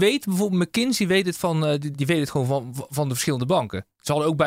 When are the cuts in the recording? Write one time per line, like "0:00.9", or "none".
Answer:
0:01.9

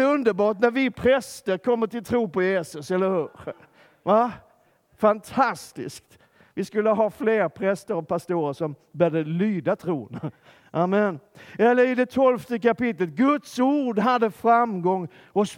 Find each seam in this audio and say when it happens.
none

